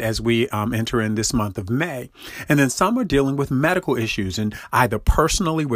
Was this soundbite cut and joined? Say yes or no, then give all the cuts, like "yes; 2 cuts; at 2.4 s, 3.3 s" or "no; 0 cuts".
no; 0 cuts